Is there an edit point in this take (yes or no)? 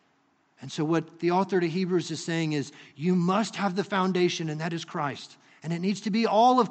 no